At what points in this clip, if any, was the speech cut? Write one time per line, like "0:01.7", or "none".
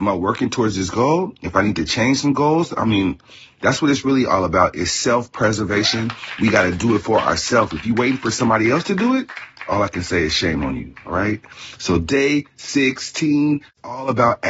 none